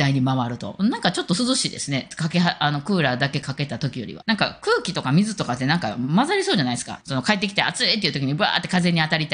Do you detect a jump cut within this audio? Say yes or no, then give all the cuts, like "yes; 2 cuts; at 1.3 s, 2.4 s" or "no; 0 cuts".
yes; 2 cuts; at 4.2 s, 7.0 s